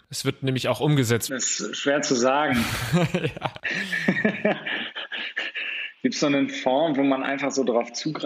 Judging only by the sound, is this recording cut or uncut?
cut